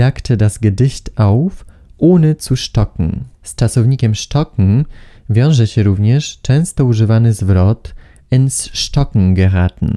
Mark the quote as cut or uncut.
cut